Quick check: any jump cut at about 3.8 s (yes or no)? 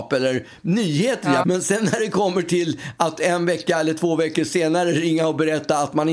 no